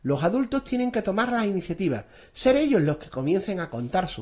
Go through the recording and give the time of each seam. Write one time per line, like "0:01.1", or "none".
none